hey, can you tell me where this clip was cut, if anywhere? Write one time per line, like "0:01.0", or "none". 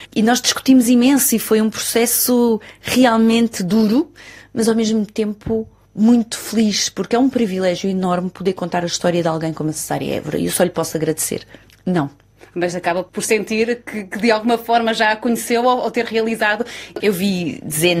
0:11.7
0:17.0